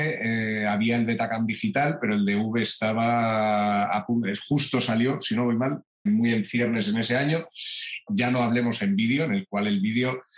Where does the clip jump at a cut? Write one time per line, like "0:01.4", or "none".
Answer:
0:06.1
0:08.1